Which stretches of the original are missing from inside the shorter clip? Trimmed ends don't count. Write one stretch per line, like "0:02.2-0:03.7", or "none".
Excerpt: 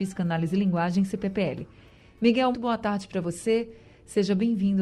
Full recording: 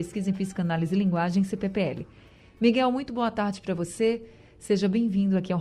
0:02.9-0:03.1